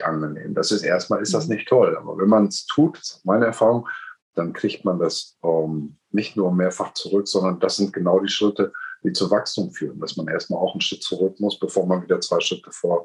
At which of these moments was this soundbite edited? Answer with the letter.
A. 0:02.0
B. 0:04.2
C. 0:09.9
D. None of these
B